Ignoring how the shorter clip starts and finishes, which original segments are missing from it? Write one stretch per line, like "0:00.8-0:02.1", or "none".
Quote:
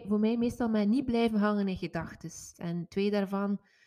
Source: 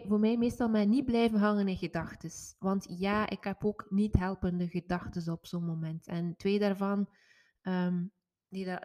0:02.5-0:06.0

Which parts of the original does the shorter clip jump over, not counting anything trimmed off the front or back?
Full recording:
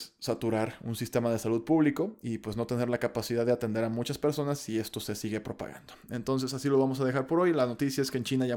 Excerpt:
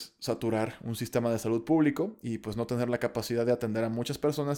none

